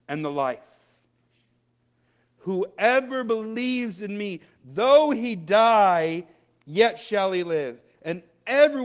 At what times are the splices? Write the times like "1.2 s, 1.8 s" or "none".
none